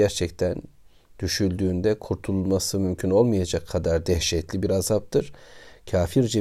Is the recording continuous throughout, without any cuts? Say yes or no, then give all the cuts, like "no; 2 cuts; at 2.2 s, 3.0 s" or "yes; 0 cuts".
yes; 0 cuts